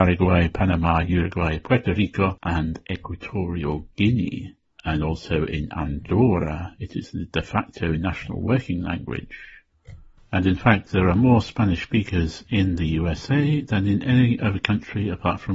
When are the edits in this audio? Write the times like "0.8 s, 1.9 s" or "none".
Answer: 10.2 s